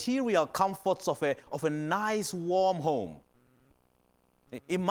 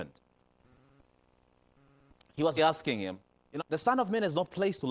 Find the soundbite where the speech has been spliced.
second; 2 cuts; at 2.6 s, 3.6 s

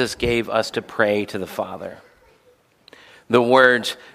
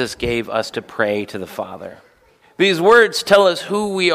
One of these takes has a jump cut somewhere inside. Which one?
second; 1 cut; at 2.4 s

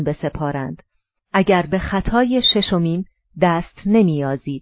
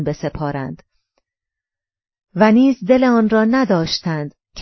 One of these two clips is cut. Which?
first; 1 cut; at 1.2 s

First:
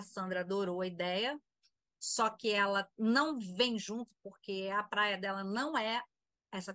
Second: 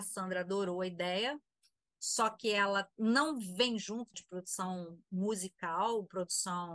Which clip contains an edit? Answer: second; 1 cut; at 4.1 s

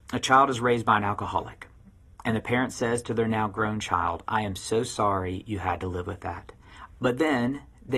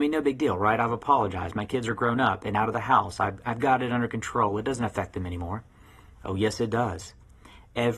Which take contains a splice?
first; 1 cut; at 6.9 s

